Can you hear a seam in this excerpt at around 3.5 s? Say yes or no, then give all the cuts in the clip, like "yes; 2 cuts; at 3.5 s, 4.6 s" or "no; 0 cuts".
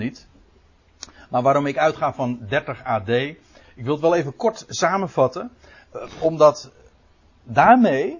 no; 0 cuts